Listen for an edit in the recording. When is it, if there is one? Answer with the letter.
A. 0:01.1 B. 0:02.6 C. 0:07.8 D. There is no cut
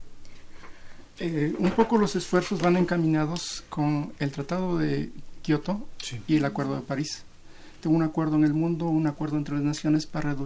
C